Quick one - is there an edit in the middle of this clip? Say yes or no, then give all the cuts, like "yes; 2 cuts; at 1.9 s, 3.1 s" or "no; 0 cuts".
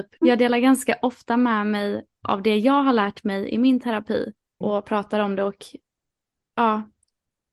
yes; 1 cut; at 4.6 s